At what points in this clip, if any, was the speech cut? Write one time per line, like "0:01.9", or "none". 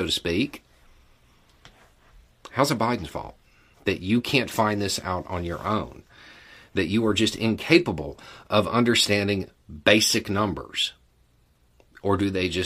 0:03.7